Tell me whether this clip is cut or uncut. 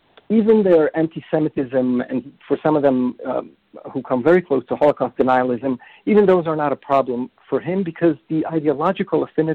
uncut